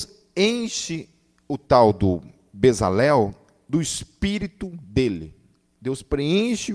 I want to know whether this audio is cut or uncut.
uncut